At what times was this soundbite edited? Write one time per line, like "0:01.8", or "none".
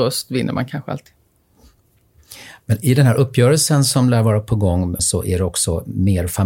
0:05.0